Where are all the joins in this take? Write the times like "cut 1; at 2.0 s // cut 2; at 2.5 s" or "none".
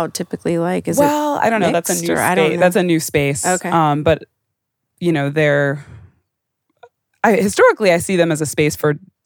none